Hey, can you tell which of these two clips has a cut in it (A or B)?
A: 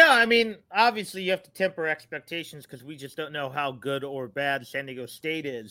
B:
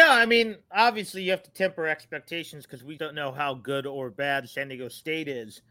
B